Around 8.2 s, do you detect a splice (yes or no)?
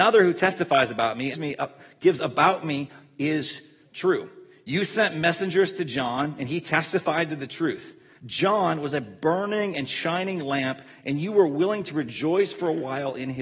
yes